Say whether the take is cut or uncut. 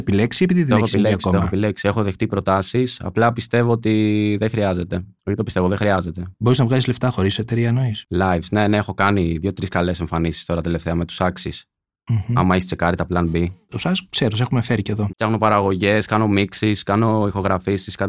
cut